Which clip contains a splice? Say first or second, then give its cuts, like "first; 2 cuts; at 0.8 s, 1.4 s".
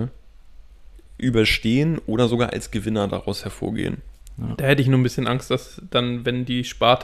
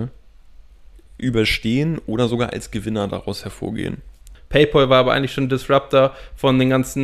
second; 1 cut; at 4.3 s